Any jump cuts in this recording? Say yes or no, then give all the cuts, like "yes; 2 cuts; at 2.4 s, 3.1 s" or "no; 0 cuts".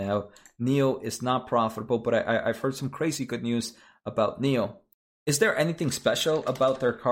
no; 0 cuts